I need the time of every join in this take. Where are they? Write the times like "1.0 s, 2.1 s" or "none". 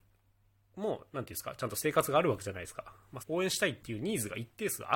3.2 s